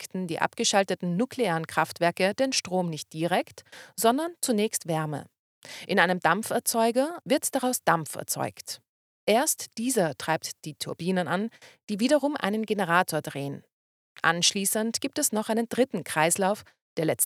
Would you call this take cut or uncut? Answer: cut